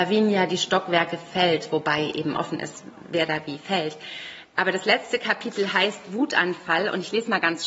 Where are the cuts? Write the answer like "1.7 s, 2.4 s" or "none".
none